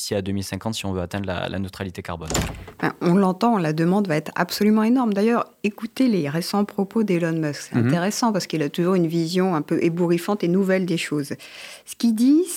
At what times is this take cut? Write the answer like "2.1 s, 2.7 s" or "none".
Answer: none